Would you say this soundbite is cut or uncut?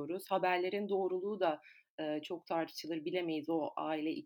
uncut